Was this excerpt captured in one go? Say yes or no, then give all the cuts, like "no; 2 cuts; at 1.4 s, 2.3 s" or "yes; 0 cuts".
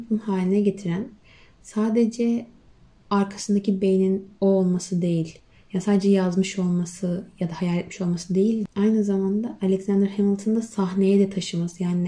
yes; 0 cuts